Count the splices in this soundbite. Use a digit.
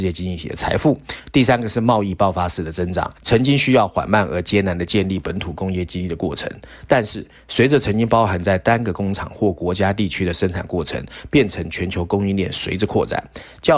1